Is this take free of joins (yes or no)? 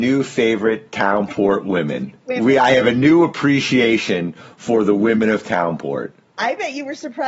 yes